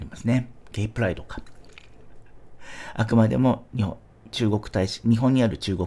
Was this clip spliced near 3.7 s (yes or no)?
no